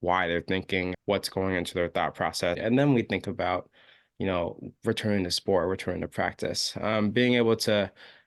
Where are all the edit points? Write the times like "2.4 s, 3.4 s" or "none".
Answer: 0.9 s, 2.5 s

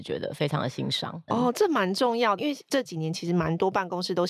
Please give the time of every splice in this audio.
1.3 s, 2.4 s

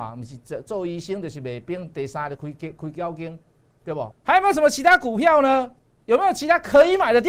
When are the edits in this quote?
4.1 s

